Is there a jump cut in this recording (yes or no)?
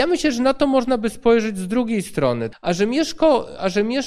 yes